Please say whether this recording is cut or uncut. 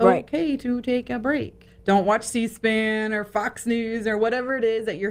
cut